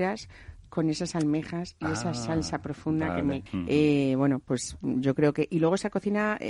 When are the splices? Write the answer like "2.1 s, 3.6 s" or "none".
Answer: 3.5 s